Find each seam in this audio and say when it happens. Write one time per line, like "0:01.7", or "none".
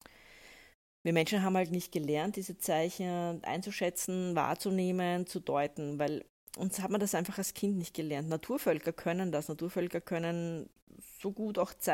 none